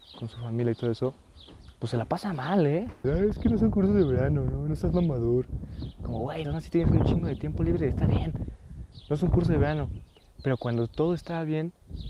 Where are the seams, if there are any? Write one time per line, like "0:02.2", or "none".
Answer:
0:03.0
0:06.4

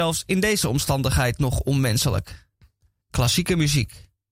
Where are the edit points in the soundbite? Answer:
0:03.0

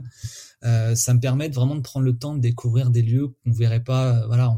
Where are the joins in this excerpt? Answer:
none

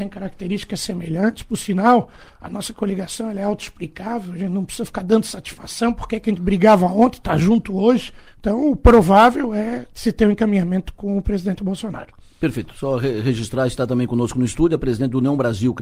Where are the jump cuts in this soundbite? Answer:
0:08.3

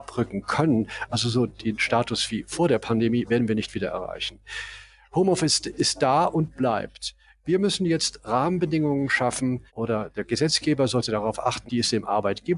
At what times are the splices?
0:09.7
0:11.7

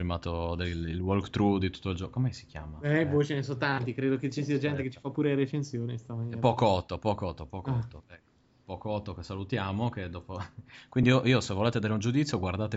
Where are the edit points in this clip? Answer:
none

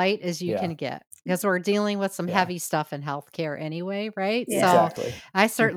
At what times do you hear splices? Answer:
none

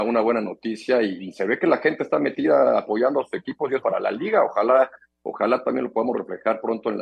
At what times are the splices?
0:03.8

